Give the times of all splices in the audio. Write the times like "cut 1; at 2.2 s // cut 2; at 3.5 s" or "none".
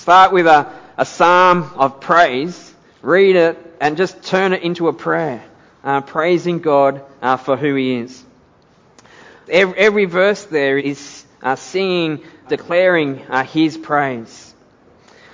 cut 1; at 9.5 s // cut 2; at 10.8 s // cut 3; at 12.4 s